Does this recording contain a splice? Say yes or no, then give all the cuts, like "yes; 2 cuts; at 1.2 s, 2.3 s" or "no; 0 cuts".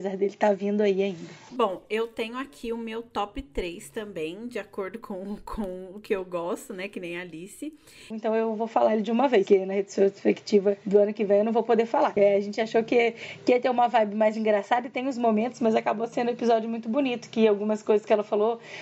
yes; 3 cuts; at 1.5 s, 8.1 s, 12.2 s